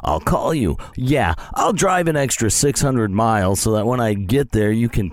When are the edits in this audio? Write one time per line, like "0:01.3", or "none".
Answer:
0:00.9